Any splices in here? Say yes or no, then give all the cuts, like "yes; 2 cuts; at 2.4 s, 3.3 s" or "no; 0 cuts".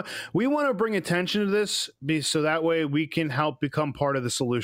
no; 0 cuts